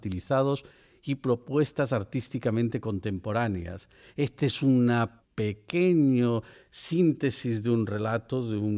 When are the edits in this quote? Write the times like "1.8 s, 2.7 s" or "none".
none